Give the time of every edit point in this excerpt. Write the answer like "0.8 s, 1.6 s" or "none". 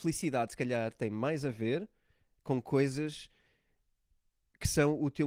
2.4 s